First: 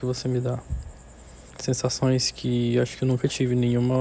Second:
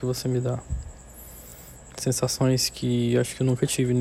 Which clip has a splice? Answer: first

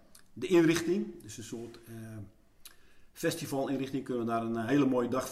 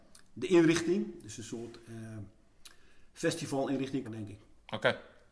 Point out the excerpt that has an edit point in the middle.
second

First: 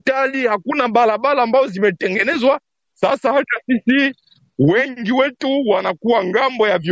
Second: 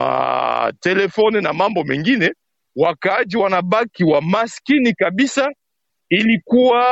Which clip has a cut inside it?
first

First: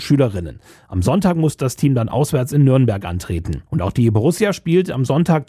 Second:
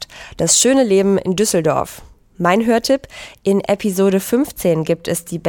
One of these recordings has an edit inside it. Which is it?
first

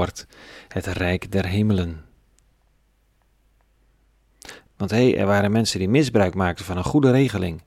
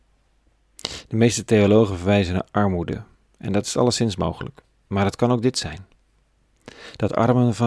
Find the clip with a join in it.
first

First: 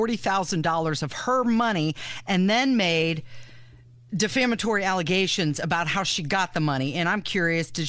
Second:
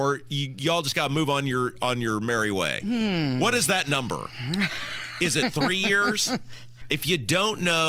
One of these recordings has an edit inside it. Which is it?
second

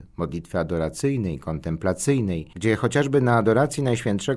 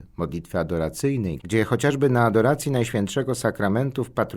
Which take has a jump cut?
second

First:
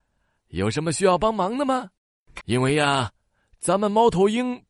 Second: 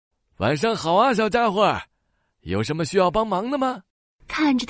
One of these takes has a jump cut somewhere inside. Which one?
first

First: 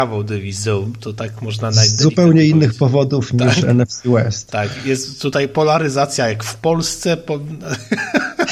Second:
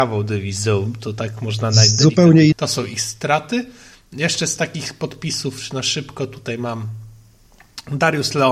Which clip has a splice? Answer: second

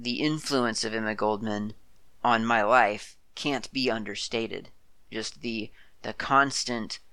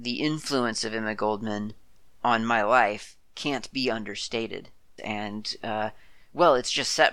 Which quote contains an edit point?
second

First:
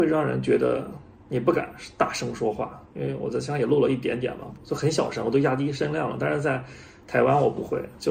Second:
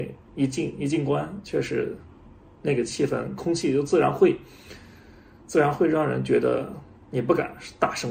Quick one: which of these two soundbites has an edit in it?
first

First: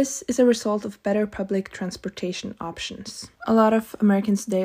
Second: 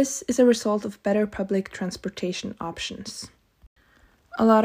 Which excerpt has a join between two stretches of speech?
first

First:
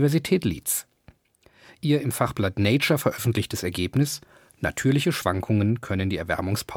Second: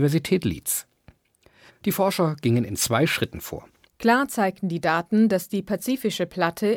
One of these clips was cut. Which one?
second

